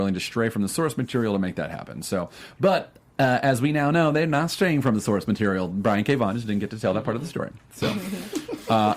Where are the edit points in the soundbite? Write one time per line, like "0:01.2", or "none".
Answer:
none